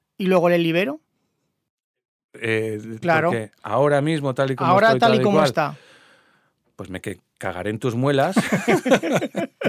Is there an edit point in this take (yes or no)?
yes